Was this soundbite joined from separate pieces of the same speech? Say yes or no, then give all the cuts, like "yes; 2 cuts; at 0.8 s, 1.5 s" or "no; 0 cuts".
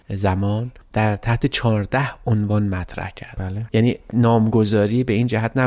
yes; 1 cut; at 3.7 s